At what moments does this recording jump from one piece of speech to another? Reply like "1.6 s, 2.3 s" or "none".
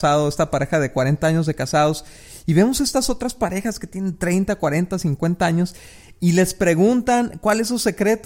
none